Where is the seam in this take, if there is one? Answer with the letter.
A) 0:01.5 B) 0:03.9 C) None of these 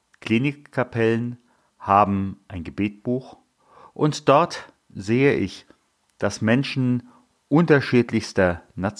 C